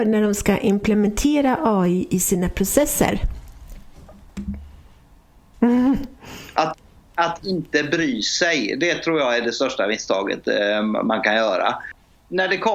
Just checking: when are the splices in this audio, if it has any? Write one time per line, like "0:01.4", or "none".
0:05.5